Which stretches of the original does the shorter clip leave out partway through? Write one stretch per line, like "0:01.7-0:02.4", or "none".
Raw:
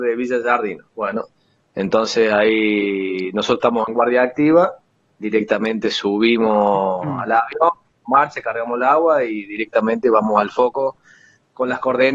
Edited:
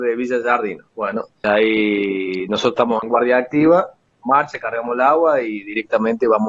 0:01.4-0:02.3
0:04.9-0:07.9